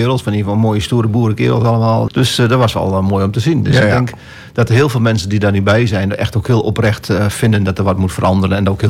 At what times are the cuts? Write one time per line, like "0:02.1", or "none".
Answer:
0:02.1